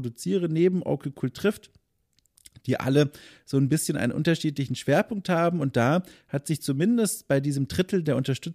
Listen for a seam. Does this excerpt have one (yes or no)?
no